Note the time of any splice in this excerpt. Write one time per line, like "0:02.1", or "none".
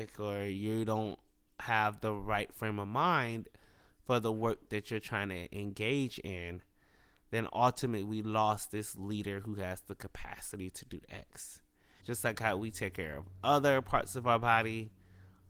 0:12.0